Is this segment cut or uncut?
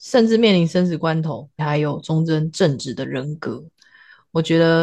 cut